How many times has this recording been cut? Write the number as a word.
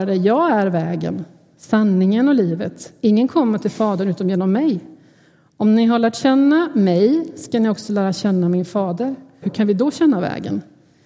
one